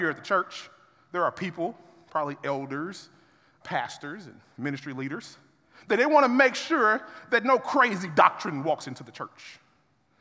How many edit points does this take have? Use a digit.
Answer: 1